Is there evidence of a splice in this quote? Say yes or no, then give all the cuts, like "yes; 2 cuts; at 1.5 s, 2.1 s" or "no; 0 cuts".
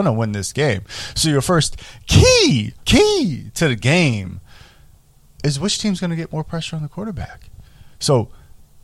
yes; 1 cut; at 2.8 s